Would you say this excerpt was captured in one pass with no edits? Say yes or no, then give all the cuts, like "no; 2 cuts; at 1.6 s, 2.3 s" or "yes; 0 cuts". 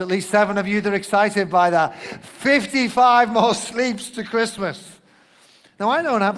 yes; 0 cuts